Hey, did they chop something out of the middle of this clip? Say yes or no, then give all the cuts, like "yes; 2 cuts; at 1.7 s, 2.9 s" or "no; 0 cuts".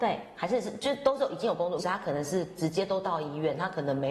yes; 1 cut; at 1.8 s